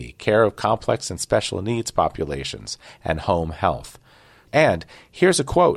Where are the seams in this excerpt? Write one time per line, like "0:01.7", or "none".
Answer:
0:04.5